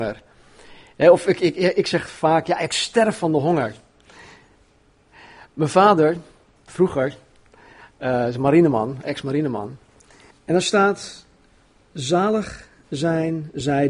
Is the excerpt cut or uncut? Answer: cut